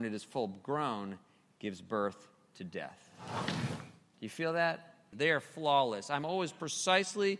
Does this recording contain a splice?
yes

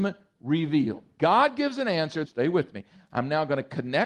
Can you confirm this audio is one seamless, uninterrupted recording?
no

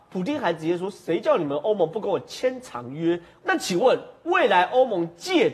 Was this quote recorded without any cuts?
no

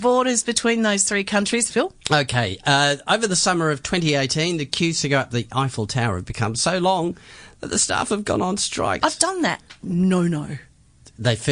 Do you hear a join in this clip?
yes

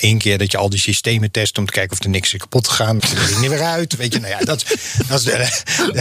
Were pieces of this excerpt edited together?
yes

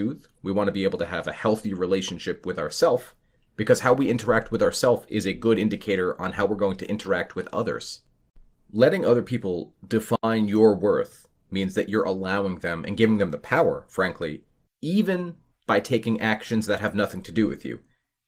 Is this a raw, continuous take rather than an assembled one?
no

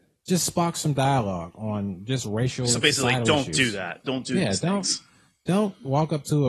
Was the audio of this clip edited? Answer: no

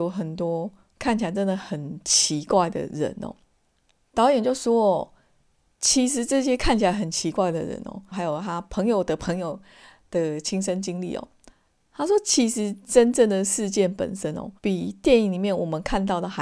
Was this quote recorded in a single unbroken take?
no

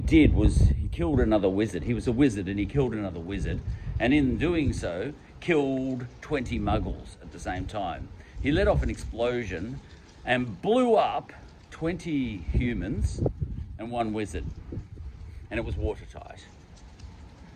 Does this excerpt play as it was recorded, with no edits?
yes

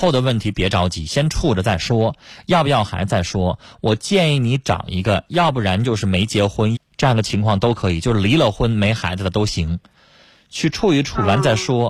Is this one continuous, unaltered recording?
no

